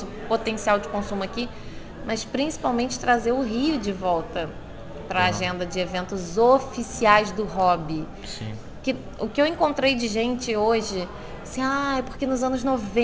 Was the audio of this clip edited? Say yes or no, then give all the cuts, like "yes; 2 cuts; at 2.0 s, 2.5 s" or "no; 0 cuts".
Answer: no; 0 cuts